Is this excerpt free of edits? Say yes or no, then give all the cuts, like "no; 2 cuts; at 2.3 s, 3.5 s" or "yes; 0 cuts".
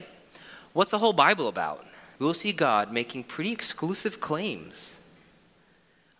no; 1 cut; at 2.2 s